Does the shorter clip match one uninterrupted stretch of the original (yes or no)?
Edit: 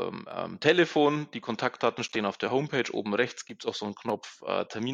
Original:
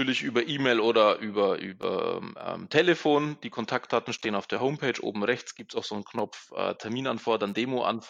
yes